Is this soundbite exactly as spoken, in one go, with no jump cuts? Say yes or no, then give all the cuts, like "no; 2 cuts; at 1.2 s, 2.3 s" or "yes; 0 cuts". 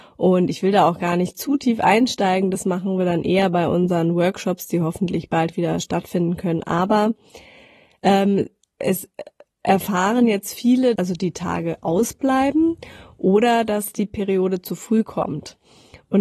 no; 1 cut; at 11.0 s